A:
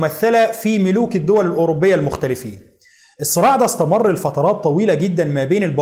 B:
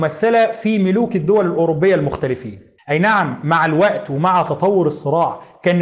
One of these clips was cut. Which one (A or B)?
B